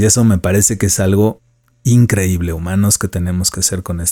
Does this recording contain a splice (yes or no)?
no